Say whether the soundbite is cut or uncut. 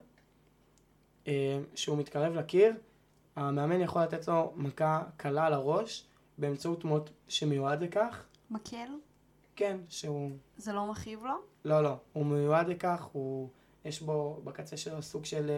cut